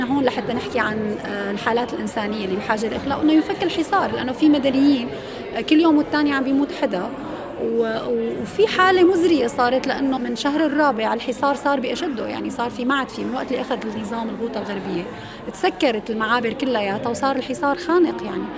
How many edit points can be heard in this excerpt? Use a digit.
1